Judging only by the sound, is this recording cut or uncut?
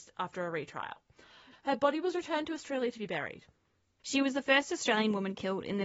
cut